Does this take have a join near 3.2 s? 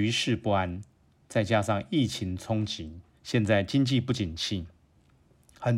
yes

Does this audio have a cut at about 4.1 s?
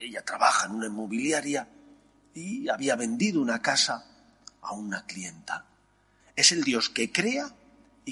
no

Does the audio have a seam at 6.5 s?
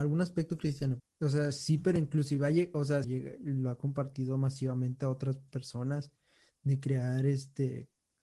no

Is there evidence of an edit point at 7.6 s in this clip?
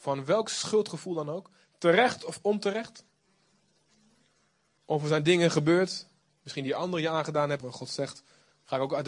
yes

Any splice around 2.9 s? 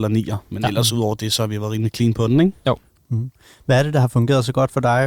no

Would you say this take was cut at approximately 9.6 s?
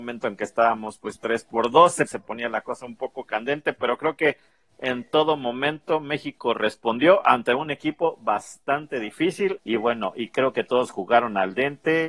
yes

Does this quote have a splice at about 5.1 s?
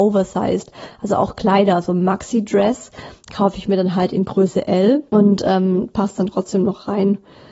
yes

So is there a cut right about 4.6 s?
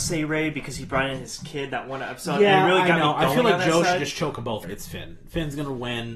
yes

